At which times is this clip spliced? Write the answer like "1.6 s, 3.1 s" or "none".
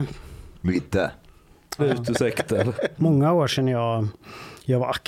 1.8 s, 3.0 s